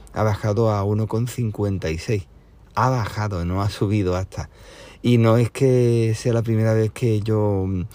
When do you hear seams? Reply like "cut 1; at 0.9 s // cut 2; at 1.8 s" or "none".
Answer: none